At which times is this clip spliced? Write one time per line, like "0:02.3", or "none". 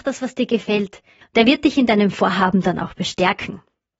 0:01.2